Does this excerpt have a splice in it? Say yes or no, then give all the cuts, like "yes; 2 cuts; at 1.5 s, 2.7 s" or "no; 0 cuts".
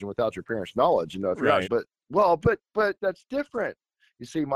yes; 2 cuts; at 1.6 s, 3.0 s